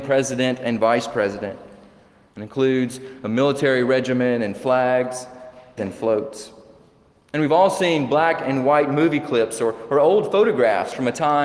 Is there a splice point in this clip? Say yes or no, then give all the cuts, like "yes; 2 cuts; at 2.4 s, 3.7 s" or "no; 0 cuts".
yes; 1 cut; at 5.8 s